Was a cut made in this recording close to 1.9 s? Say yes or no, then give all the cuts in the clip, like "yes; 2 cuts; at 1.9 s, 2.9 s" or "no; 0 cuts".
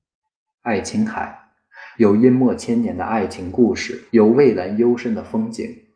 yes; 2 cuts; at 1.9 s, 4.1 s